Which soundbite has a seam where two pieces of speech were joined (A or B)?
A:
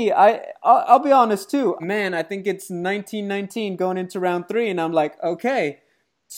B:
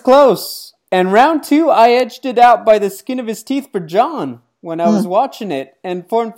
A